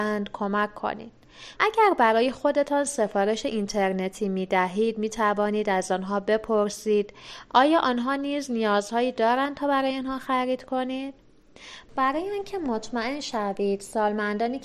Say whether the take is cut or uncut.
cut